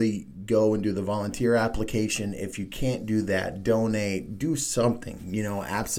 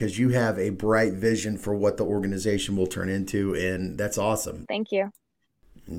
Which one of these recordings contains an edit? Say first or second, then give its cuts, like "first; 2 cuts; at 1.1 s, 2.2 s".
second; 1 cut; at 4.7 s